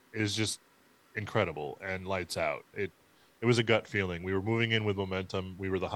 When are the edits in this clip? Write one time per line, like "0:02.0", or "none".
0:02.7